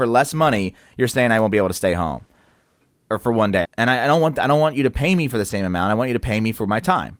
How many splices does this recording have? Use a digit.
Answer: 1